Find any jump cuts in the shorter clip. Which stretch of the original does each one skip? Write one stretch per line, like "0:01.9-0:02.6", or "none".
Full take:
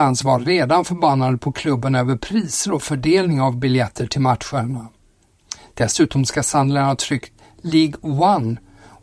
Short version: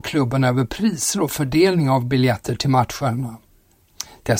none